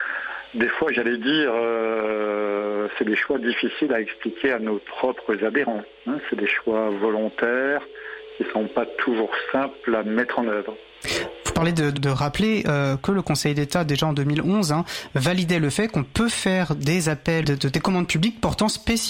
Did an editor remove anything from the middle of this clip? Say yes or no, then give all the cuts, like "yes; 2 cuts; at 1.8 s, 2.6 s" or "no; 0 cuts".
yes; 2 cuts; at 12.0 s, 17.4 s